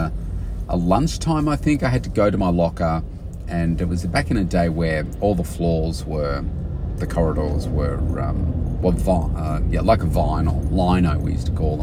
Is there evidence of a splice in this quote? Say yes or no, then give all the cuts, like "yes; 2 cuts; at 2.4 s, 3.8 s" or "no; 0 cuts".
no; 0 cuts